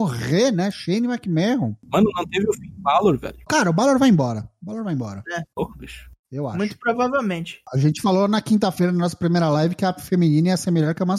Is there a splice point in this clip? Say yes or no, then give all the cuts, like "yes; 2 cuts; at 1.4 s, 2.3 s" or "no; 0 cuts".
yes; 2 cuts; at 5.5 s, 7.6 s